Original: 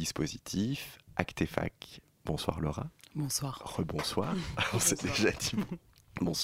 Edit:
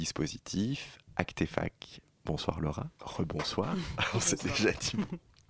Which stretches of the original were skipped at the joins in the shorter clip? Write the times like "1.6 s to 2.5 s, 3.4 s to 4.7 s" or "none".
3.0 s to 3.6 s